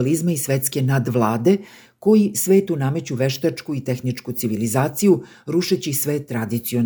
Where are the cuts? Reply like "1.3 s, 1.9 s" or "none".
none